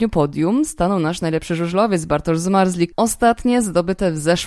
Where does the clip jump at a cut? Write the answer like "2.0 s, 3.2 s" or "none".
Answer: 2.9 s